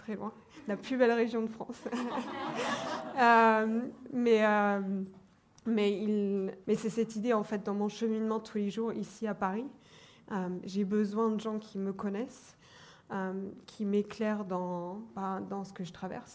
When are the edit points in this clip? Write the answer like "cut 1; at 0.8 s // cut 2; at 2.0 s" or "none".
cut 1; at 6.6 s